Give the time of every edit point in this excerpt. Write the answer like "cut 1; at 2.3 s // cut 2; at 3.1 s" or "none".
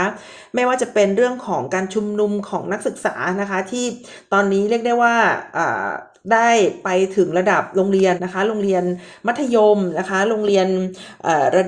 cut 1; at 8.2 s

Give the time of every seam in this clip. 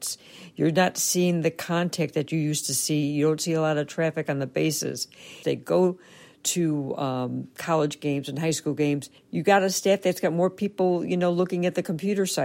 cut 1; at 5.4 s // cut 2; at 9.2 s

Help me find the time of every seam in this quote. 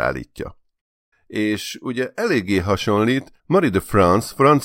cut 1; at 1.1 s // cut 2; at 3.4 s

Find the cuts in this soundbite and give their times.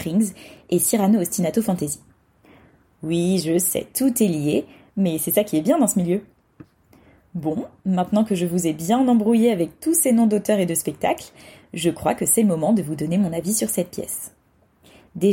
none

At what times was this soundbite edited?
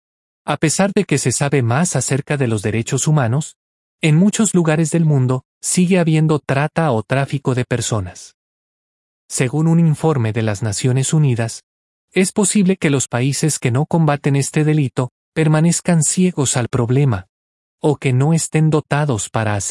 none

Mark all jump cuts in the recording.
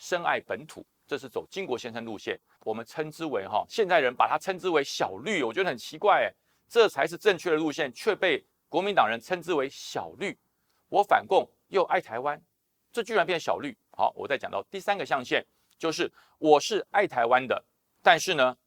none

